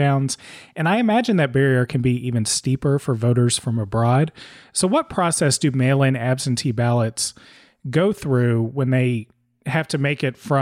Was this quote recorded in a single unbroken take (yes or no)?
yes